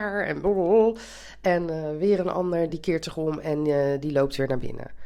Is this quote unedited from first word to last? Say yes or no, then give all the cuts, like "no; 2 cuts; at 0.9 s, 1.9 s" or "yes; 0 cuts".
no; 1 cut; at 2.7 s